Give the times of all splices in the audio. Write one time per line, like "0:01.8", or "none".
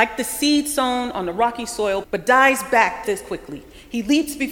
0:02.0
0:03.0